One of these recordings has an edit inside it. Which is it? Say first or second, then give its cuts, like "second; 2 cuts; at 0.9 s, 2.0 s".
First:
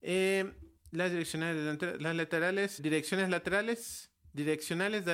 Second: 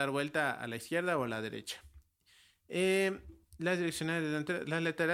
first; 1 cut; at 2.8 s